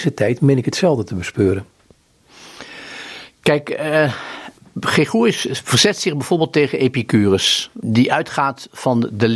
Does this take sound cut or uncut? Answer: uncut